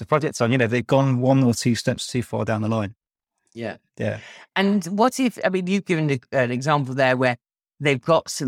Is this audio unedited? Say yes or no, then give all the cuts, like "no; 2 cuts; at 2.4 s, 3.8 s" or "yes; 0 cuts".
yes; 0 cuts